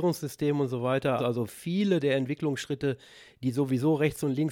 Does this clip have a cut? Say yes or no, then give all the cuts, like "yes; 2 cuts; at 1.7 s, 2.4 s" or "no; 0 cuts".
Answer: yes; 1 cut; at 1.2 s